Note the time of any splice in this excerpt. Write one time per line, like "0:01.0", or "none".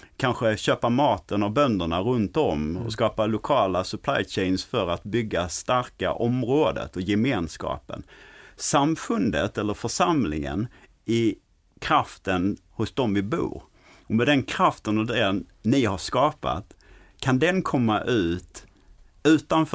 none